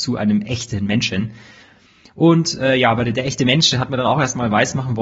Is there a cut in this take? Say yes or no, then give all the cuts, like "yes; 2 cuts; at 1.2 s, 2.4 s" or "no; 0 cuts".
no; 0 cuts